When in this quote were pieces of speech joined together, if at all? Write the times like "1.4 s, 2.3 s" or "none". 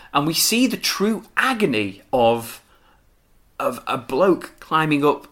none